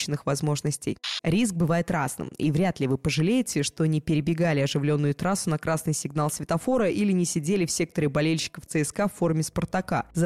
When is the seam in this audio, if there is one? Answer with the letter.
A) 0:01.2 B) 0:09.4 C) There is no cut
A